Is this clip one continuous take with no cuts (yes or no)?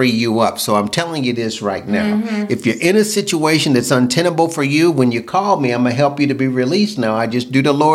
yes